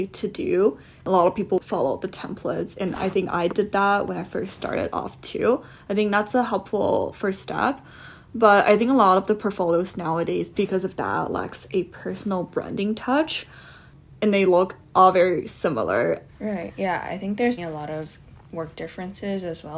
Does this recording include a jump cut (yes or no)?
yes